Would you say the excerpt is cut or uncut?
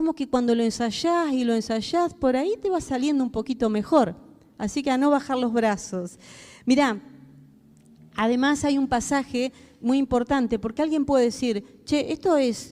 uncut